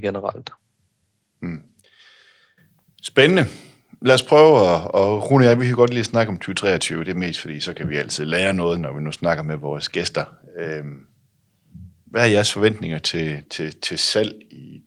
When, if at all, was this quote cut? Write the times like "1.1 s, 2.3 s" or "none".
none